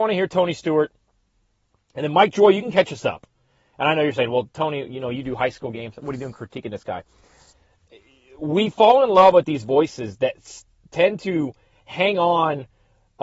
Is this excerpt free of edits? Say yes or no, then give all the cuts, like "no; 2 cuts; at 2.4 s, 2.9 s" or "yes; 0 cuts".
yes; 0 cuts